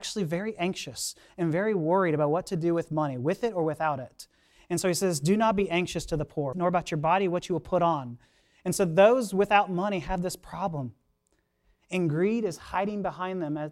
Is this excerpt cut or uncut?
cut